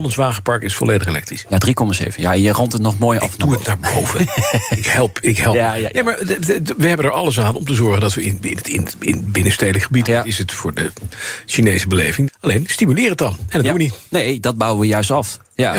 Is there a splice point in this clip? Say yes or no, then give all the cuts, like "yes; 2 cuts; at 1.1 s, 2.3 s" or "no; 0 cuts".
yes; 3 cuts; at 5.9 s, 10.1 s, 12.3 s